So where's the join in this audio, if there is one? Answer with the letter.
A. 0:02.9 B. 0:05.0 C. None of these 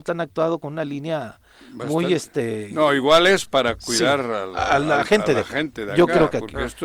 C